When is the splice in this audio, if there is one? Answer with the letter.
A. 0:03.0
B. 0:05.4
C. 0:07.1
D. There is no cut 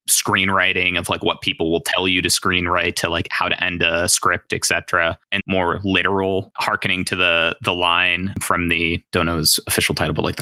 B